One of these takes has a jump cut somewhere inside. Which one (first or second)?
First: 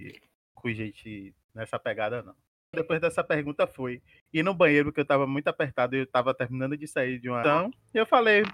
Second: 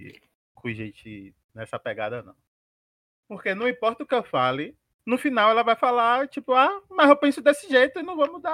first